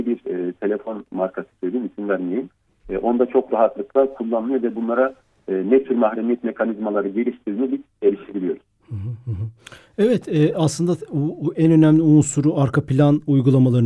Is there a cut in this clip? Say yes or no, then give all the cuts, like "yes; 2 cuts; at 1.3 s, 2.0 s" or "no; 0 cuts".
no; 0 cuts